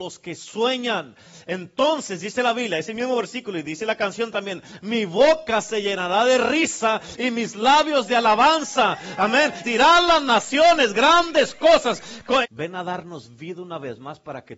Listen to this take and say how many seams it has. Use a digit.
2